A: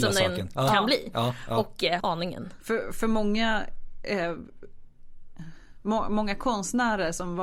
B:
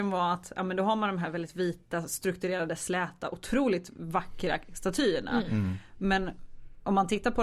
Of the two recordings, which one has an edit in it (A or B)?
A